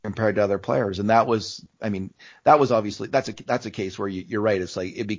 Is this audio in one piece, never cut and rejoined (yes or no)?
yes